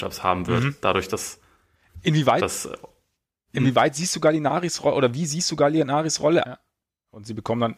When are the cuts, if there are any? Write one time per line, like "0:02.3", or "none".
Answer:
0:06.4